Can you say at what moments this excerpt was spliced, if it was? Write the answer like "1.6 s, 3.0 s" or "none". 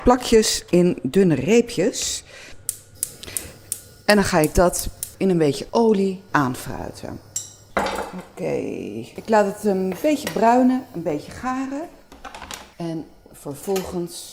9.2 s, 12.7 s